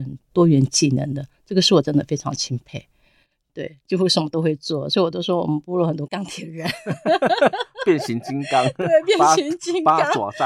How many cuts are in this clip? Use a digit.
1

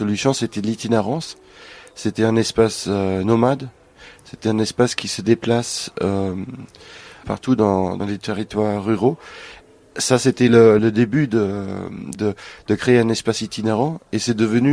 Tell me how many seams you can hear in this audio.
3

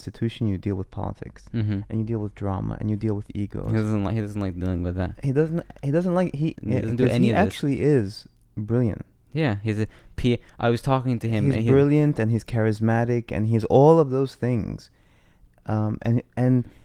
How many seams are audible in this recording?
1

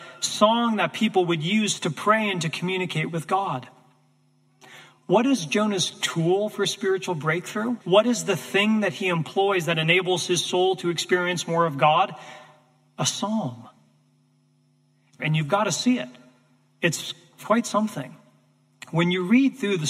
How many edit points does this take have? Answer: 2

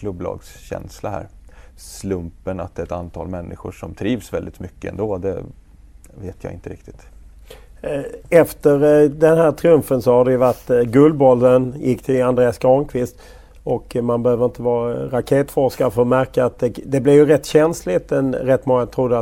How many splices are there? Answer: 1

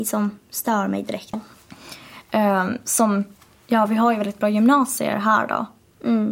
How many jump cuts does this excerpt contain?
1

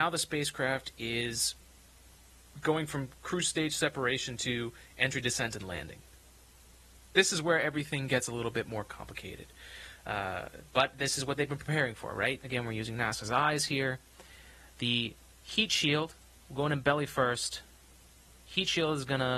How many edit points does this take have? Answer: 1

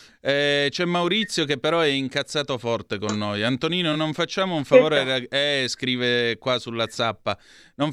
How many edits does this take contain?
0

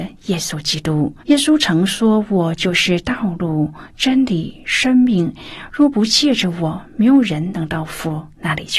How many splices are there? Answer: 1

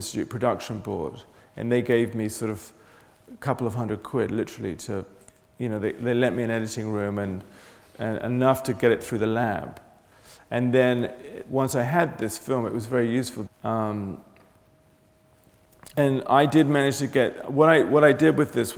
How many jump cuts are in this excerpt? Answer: 1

